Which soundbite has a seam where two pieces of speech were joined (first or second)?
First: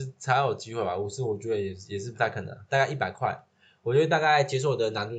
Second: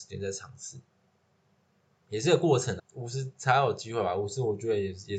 second